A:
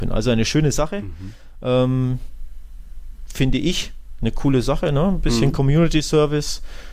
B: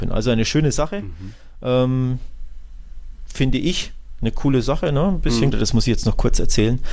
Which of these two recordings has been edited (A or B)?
B